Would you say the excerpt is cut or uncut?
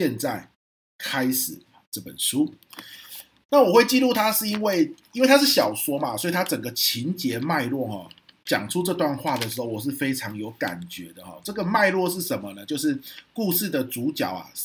uncut